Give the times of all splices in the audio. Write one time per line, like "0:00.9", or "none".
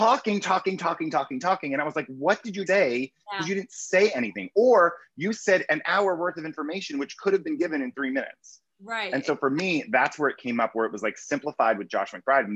0:02.7